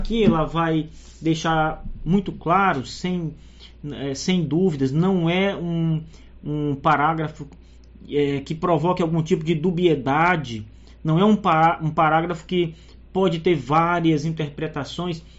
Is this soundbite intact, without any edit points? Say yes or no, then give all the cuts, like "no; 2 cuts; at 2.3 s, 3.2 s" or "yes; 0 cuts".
yes; 0 cuts